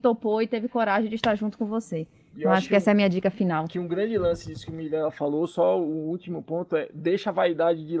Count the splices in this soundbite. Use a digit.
0